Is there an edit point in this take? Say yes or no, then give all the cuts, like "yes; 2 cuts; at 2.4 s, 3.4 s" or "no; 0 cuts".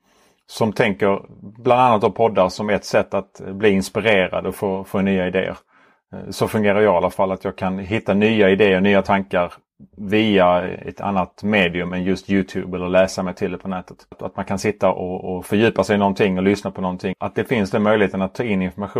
yes; 2 cuts; at 14.1 s, 17.1 s